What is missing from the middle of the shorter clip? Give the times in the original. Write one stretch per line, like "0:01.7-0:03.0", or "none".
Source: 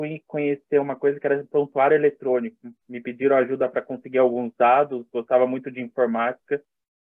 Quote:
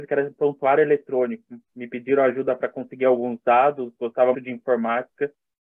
0:05.5-0:05.6